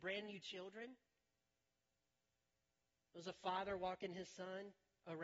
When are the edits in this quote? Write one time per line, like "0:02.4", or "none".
none